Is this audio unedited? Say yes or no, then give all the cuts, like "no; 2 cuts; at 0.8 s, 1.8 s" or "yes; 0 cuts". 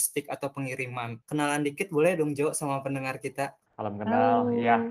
no; 2 cuts; at 1.2 s, 3.7 s